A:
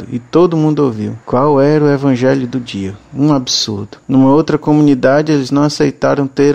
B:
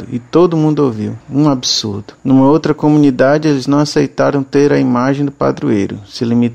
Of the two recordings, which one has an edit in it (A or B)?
B